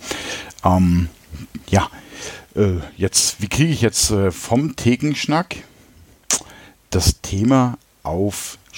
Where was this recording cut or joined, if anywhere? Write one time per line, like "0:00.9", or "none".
none